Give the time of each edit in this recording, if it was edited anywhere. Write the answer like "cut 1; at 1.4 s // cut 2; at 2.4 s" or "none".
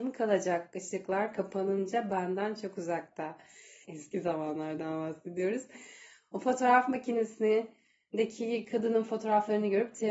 cut 1; at 3.8 s

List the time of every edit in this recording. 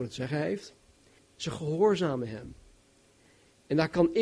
cut 1; at 1.2 s

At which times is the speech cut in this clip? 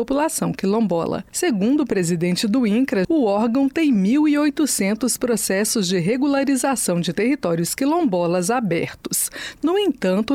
cut 1; at 3.0 s

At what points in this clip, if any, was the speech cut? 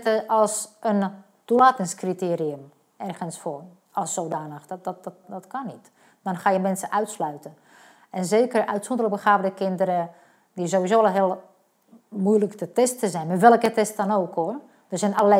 cut 1; at 5.2 s

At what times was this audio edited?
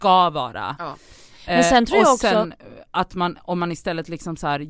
none

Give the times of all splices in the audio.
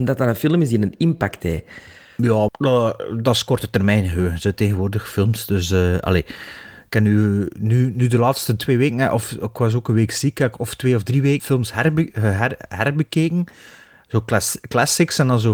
cut 1; at 2.5 s // cut 2; at 11.4 s

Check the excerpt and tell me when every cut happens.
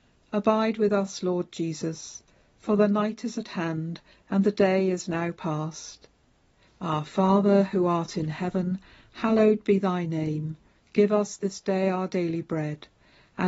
cut 1; at 6.7 s // cut 2; at 10.8 s

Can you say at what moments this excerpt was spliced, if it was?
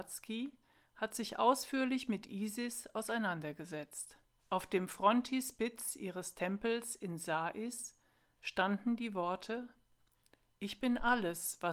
cut 1; at 4.4 s

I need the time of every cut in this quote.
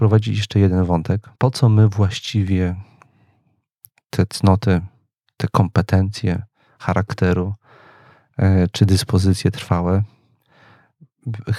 cut 1; at 1.4 s

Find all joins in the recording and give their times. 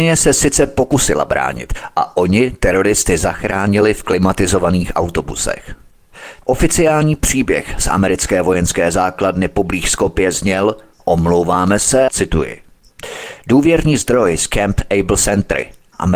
cut 1; at 6.4 s // cut 2; at 12.1 s

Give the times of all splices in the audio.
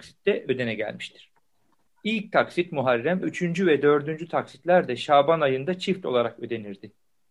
cut 1; at 1.9 s // cut 2; at 3.2 s

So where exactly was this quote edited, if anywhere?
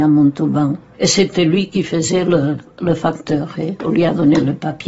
cut 1; at 0.9 s

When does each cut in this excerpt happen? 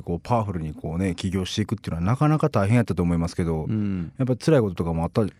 none

